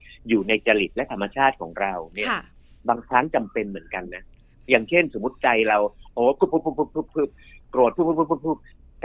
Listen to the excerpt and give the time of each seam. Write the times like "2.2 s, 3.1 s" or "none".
none